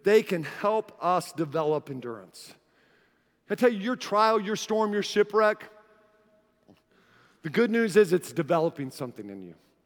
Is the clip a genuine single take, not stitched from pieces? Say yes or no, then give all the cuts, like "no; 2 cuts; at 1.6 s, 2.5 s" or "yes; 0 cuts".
yes; 0 cuts